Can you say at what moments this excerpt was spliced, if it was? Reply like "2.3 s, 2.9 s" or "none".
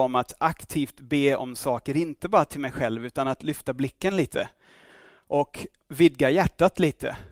none

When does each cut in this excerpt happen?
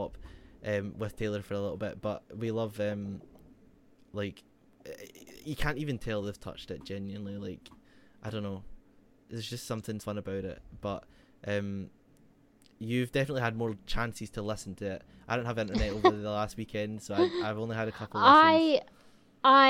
10.0 s

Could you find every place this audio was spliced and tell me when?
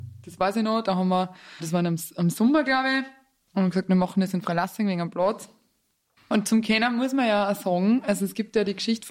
6.2 s

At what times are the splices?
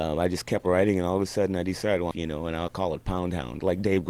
2.1 s

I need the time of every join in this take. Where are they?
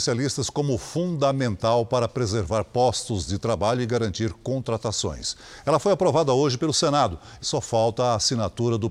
7.4 s

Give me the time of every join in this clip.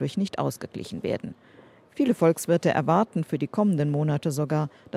none

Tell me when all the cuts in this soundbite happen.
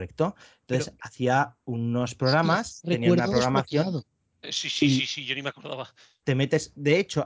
6.2 s

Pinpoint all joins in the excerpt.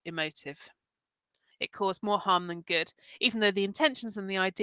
1.5 s

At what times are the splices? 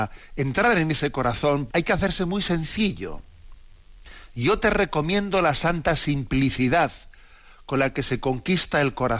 1.7 s

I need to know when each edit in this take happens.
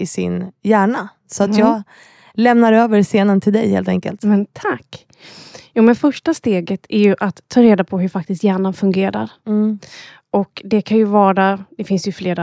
none

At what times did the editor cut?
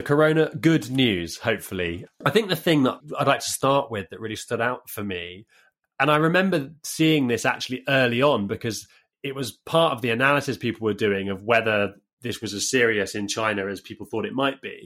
2.1 s

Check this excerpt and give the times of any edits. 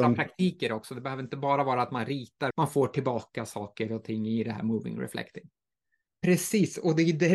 2.5 s, 6.1 s

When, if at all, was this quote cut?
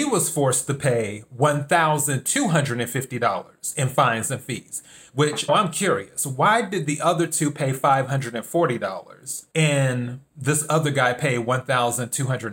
5.5 s, 9.5 s

